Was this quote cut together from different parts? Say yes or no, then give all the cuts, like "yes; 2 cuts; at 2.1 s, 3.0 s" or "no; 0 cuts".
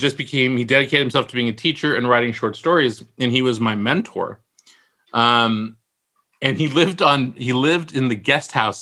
no; 0 cuts